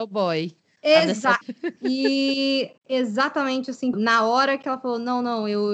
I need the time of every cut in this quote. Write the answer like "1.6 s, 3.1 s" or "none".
1.4 s, 2.8 s, 3.9 s